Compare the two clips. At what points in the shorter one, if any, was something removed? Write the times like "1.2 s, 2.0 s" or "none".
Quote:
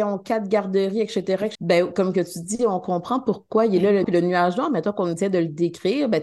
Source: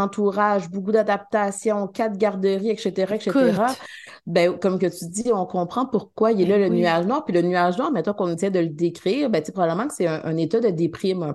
1.5 s, 4.0 s